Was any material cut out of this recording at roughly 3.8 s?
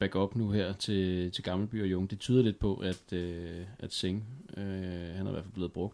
no; 1 cut; at 1.3 s

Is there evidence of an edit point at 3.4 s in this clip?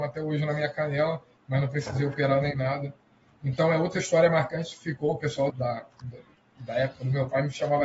no; 1 cut; at 5.5 s

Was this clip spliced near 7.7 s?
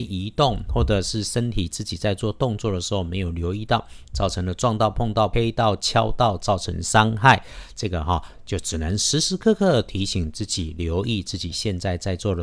no; 0 cuts

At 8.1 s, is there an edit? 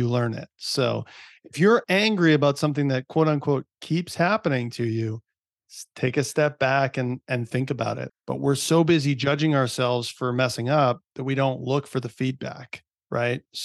yes; 1 cut; at 8.1 s

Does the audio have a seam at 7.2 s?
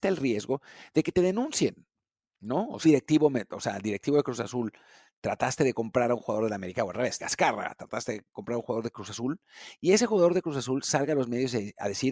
yes; 2 cuts; at 2.8 s, 7.2 s

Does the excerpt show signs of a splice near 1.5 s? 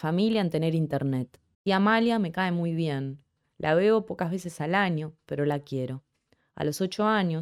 yes; 1 cut; at 1.5 s

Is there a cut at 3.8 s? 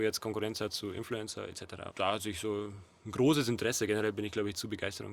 no; 1 cut; at 1.9 s

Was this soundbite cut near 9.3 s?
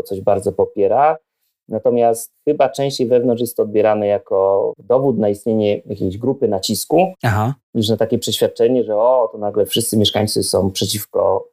no; 0 cuts

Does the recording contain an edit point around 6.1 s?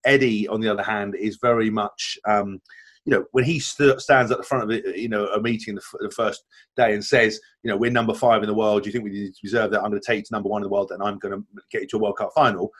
yes; 1 cut; at 6.1 s

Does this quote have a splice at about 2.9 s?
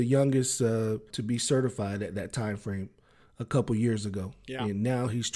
no; 1 cut; at 1.1 s

